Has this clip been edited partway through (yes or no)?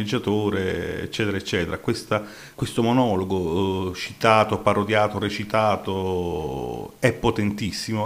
yes